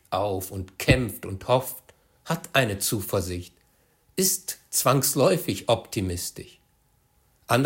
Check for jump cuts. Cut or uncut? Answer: uncut